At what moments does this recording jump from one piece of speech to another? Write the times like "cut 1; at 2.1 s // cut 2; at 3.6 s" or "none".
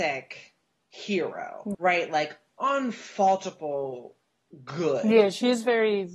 cut 1; at 1.7 s